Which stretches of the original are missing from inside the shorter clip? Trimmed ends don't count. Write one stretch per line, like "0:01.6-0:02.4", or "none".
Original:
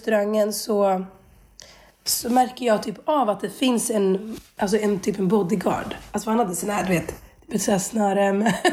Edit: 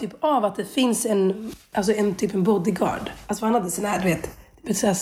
none